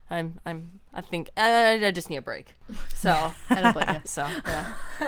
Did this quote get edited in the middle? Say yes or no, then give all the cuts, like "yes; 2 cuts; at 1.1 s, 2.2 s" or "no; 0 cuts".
yes; 1 cut; at 4.0 s